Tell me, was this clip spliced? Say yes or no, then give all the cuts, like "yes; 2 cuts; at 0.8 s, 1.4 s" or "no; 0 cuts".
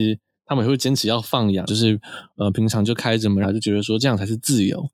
yes; 2 cuts; at 1.7 s, 3.4 s